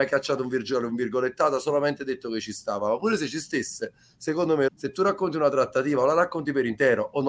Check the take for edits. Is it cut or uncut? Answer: cut